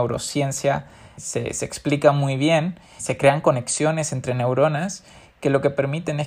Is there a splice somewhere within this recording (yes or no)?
yes